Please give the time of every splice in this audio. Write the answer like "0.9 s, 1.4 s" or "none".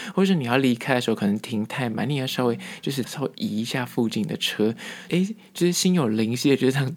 3.0 s, 5.1 s